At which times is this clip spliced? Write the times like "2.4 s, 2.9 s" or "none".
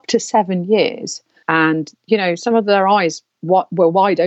1.4 s

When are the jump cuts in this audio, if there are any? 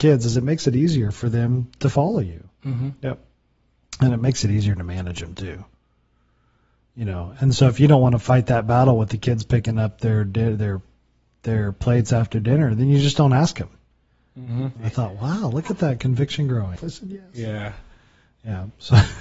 14.8 s, 16.8 s

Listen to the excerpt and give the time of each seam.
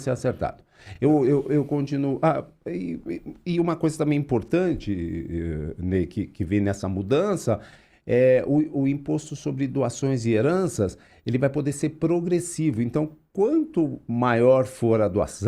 none

